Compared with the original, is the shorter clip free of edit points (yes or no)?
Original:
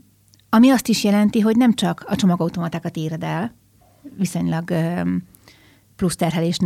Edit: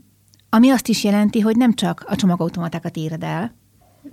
yes